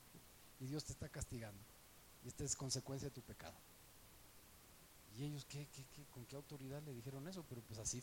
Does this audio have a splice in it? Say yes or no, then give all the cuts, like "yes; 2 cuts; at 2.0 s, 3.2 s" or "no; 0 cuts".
no; 0 cuts